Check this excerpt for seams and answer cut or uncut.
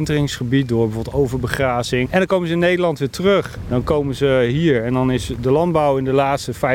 cut